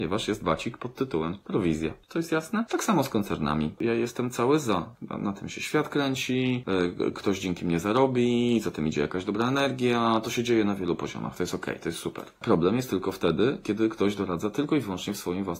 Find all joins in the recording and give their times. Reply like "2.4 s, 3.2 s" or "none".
2.0 s, 3.8 s